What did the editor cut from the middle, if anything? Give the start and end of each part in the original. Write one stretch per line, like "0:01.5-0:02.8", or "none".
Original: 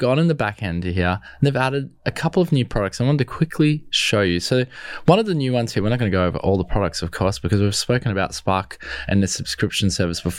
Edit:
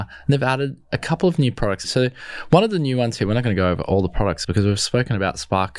0:03.0-0:04.4
0:07.0-0:07.4